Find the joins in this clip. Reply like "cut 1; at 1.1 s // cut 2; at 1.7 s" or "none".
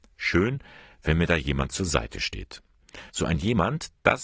cut 1; at 3.1 s